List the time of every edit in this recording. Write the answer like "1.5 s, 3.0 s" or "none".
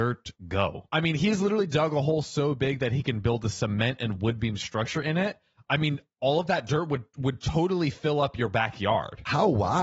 none